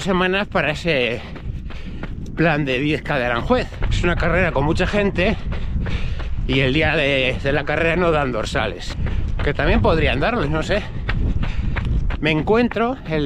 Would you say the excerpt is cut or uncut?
cut